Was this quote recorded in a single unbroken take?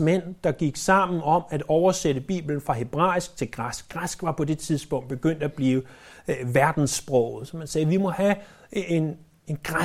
yes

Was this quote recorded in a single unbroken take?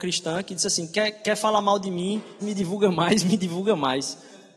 no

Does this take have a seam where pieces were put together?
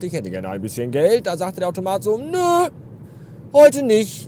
no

